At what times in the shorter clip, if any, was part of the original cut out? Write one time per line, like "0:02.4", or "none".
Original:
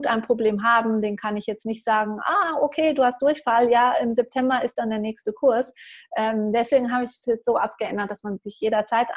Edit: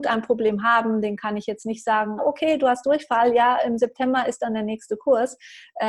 0:02.2